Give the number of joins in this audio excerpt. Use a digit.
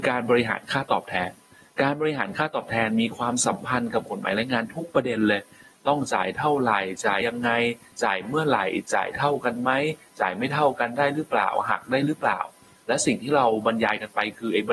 1